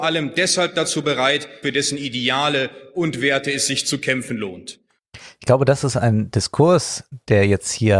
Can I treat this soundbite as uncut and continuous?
no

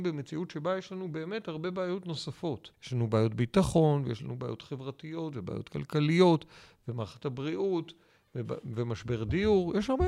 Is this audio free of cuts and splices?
no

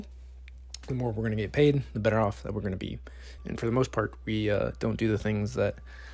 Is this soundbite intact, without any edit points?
no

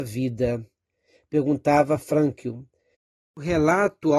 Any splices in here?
yes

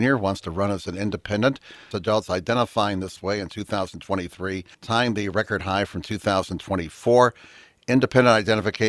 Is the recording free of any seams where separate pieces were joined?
no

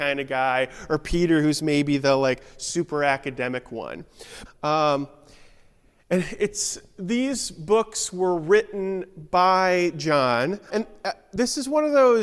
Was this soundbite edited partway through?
yes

